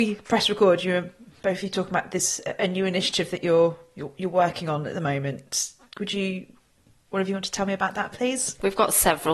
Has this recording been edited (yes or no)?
no